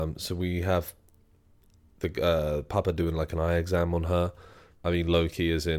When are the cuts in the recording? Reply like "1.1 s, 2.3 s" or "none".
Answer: 4.7 s